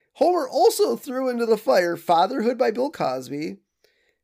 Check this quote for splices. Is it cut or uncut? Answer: uncut